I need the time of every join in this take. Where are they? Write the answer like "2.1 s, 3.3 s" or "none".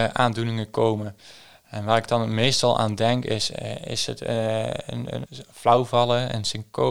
5.3 s